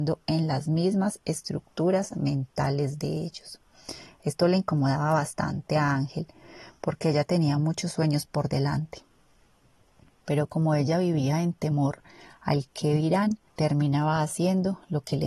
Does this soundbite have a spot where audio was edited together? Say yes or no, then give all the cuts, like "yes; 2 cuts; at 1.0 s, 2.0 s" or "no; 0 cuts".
yes; 1 cut; at 13.5 s